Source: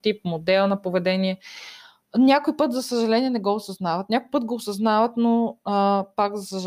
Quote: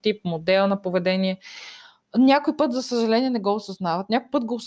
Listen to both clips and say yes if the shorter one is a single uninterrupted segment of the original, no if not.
yes